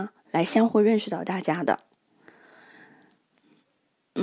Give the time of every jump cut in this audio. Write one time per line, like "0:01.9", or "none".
none

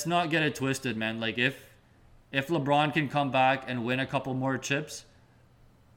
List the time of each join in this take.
none

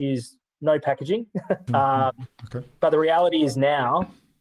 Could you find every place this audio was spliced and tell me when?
0:01.7

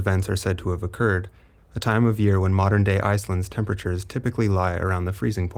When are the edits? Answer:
0:01.6

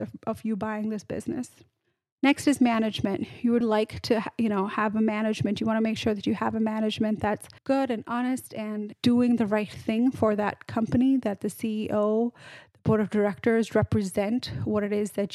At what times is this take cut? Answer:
0:03.6
0:07.6

